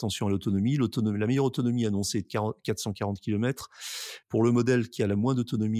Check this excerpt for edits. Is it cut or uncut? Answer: uncut